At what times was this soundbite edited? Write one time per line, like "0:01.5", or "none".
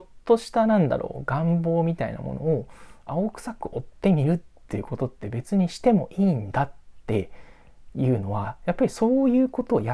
none